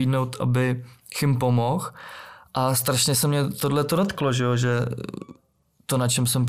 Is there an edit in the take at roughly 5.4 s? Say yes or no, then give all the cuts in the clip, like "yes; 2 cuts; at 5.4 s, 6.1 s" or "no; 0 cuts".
no; 0 cuts